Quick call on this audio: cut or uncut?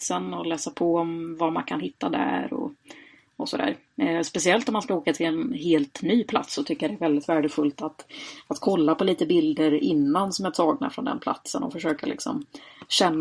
uncut